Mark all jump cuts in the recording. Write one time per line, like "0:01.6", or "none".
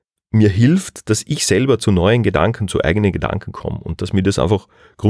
none